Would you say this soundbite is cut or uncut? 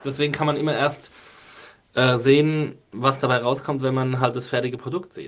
uncut